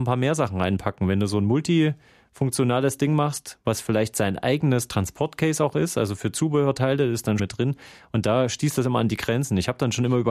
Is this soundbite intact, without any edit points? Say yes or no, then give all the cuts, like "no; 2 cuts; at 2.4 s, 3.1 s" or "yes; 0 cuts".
no; 1 cut; at 7.4 s